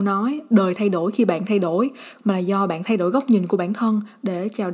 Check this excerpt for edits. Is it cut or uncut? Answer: cut